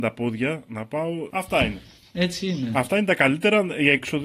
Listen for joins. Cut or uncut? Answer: cut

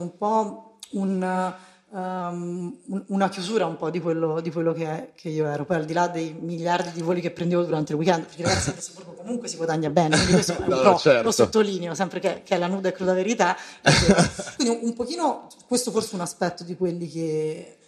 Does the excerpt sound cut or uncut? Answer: uncut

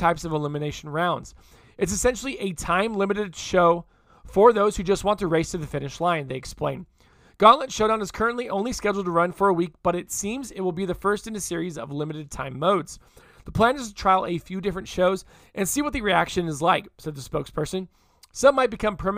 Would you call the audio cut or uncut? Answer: uncut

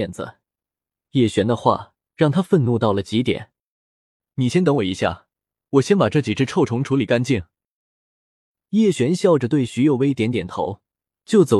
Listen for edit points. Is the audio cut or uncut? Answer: uncut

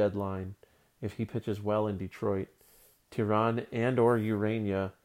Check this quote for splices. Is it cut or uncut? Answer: uncut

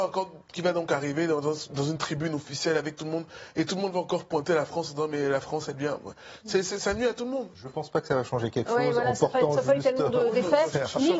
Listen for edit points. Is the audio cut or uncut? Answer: cut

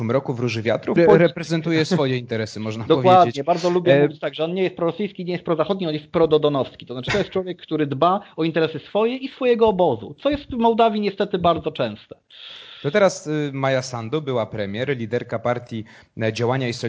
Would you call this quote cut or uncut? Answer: cut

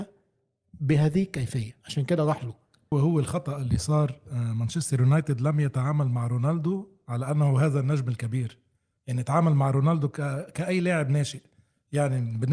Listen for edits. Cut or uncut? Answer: cut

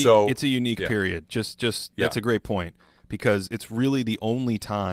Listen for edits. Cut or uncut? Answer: uncut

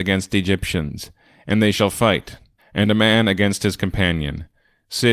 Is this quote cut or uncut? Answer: cut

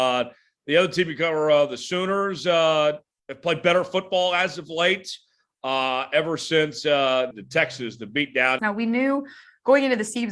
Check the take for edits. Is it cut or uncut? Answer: cut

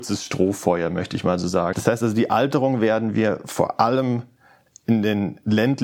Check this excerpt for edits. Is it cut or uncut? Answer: cut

